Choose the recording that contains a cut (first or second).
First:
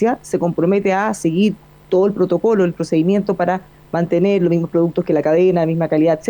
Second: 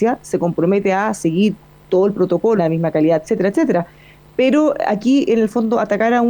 second